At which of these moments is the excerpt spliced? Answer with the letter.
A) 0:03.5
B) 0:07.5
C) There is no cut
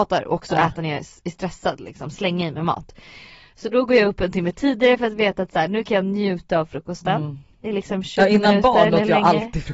C